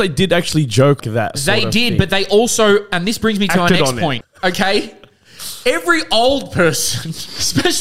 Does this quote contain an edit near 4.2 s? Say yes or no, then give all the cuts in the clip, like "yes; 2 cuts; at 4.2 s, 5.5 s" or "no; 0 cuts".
yes; 2 cuts; at 1.0 s, 4.2 s